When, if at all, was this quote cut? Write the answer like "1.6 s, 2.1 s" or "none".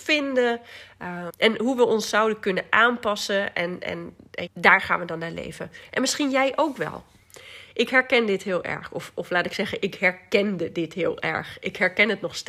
1.3 s, 4.5 s